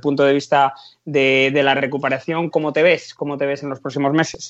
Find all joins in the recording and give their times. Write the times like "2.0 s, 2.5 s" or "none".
2.5 s